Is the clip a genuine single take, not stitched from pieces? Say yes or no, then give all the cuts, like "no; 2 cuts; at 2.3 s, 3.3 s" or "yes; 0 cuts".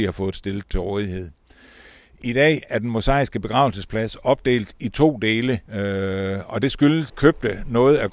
no; 2 cuts; at 5.6 s, 7.1 s